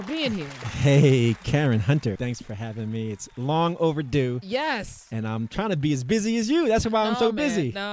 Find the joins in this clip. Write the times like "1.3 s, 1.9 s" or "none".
2.2 s